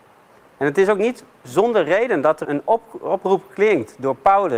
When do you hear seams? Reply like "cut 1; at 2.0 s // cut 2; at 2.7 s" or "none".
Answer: cut 1; at 2.4 s